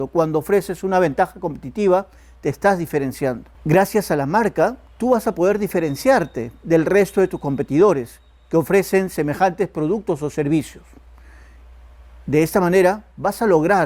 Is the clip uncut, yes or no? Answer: no